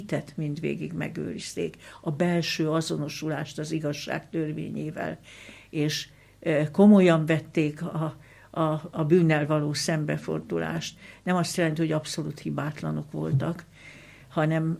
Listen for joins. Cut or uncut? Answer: uncut